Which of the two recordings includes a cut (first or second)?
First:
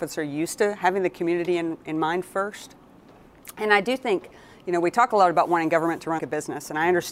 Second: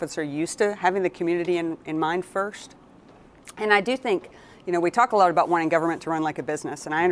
first